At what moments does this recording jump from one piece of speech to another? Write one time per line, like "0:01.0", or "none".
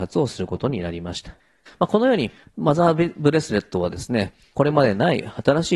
0:01.7